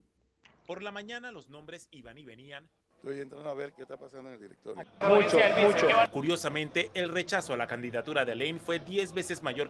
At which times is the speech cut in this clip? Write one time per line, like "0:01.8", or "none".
0:03.7
0:05.0